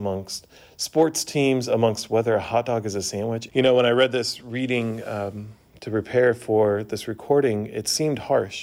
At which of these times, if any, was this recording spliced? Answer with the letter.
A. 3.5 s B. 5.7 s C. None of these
A